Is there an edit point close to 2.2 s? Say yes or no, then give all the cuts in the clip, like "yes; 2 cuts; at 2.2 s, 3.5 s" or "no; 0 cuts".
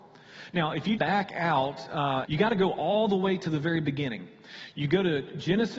yes; 2 cuts; at 1.0 s, 2.2 s